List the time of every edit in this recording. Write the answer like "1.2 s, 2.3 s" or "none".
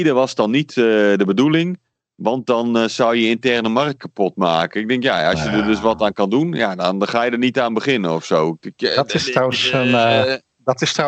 none